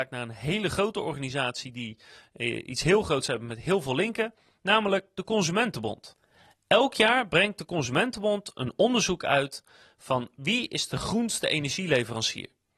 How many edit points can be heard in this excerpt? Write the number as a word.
zero